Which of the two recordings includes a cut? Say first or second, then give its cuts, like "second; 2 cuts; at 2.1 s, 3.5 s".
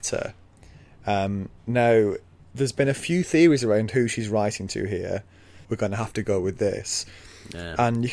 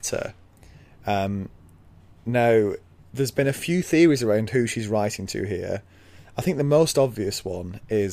first; 2 cuts; at 1.6 s, 5.6 s